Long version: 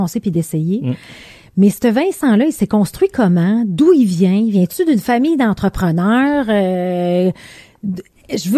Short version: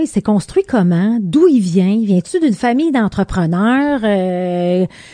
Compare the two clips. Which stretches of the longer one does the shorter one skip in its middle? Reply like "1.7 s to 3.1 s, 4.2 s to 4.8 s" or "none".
none